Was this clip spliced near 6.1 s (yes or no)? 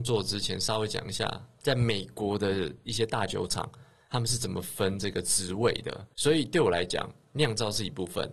yes